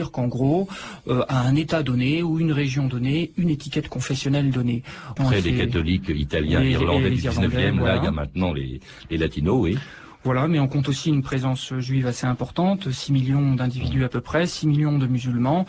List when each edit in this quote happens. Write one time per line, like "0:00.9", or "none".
0:05.2